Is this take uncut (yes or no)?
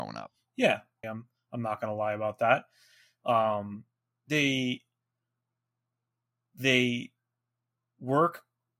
no